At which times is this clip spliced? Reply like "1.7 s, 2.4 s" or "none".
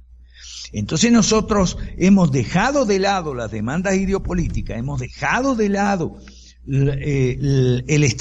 none